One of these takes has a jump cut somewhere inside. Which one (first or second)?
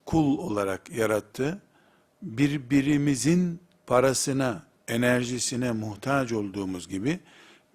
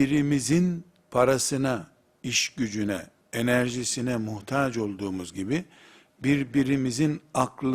first